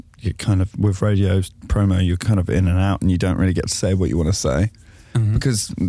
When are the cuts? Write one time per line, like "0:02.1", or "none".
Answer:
none